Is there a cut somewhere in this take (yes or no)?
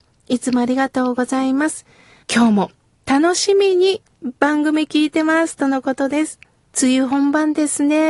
yes